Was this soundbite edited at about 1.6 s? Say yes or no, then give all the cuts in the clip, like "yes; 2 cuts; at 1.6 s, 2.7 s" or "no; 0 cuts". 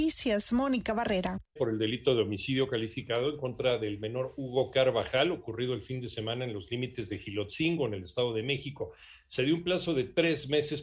yes; 1 cut; at 1.6 s